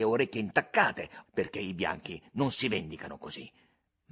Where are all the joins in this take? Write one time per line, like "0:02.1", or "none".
0:01.3

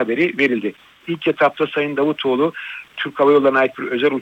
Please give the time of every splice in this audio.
0:01.0

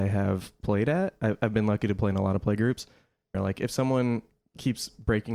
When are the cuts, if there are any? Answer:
0:03.3

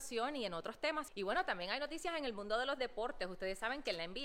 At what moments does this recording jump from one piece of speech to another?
0:01.1

